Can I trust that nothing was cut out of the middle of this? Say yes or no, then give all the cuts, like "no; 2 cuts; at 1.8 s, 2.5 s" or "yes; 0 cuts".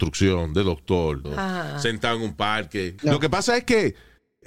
no; 2 cuts; at 1.2 s, 3.0 s